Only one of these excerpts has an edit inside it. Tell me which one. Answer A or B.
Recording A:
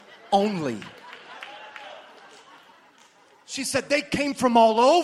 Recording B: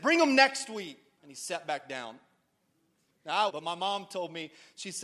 B